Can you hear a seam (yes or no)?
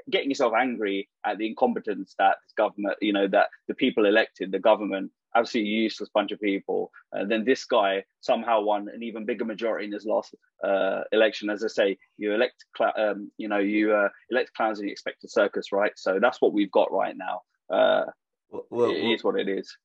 no